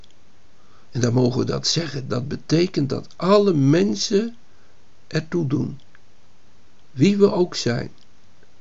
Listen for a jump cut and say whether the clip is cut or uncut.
cut